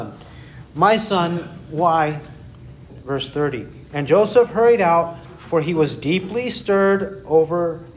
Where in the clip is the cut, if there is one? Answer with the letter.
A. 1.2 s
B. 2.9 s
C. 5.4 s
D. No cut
B